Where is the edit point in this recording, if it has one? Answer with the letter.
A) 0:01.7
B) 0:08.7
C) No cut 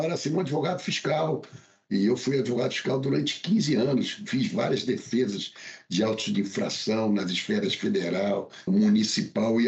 B